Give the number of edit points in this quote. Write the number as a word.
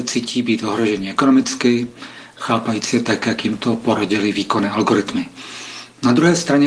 one